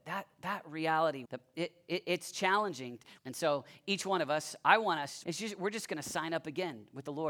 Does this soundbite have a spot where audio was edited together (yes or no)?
yes